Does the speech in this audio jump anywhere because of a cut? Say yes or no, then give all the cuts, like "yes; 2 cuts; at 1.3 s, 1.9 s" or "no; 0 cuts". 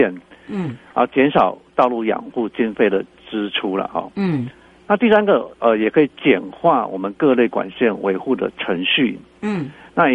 no; 0 cuts